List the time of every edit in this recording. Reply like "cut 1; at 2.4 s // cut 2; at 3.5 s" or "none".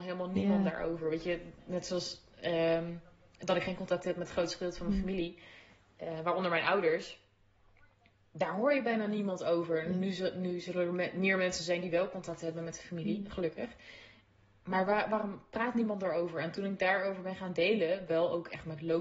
none

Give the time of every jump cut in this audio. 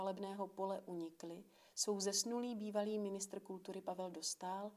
none

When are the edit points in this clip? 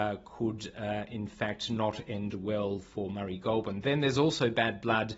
none

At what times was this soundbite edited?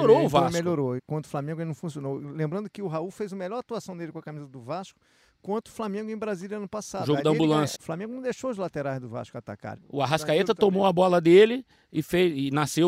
cut 1; at 1.0 s // cut 2; at 7.7 s // cut 3; at 9.8 s

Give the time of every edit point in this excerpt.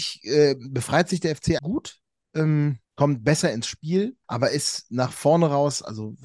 cut 1; at 1.6 s // cut 2; at 2.8 s // cut 3; at 4.2 s

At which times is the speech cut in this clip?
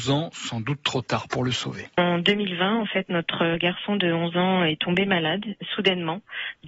cut 1; at 1.9 s

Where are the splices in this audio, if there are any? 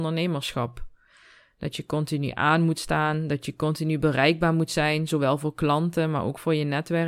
none

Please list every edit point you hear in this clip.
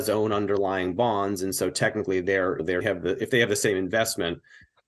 none

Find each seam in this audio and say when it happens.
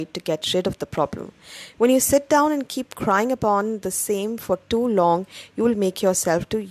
none

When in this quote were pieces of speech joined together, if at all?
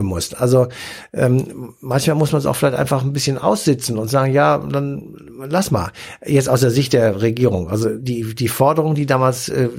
cut 1; at 8.0 s

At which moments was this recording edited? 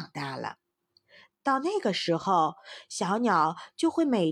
cut 1; at 1.3 s

